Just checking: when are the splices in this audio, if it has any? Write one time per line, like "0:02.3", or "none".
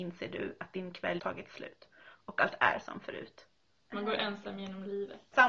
0:01.2
0:03.8